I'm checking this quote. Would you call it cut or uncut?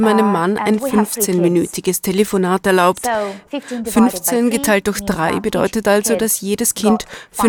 cut